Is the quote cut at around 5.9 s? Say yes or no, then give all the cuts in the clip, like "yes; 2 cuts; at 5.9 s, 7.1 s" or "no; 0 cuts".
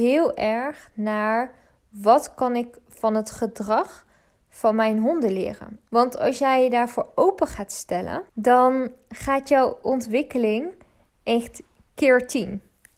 yes; 2 cuts; at 5.9 s, 8.3 s